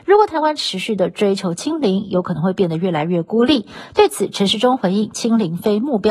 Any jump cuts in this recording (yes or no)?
no